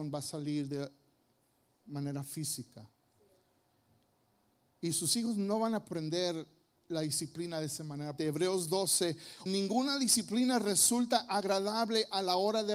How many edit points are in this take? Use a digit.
2